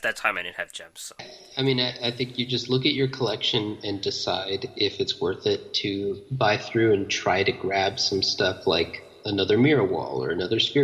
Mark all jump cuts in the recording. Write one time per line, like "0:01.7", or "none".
0:01.2